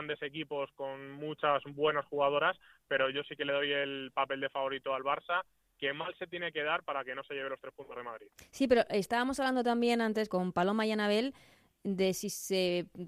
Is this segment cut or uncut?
cut